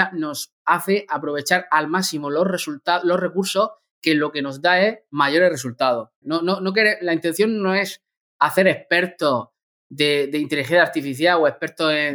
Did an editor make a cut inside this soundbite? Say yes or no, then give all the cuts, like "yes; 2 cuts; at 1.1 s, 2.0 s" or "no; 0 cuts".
yes; 1 cut; at 6.2 s